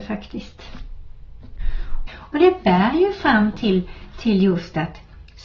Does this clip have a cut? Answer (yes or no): yes